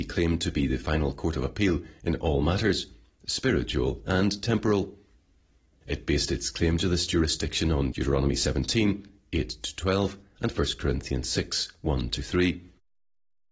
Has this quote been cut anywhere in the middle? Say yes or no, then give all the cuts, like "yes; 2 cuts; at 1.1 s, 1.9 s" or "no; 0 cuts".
no; 0 cuts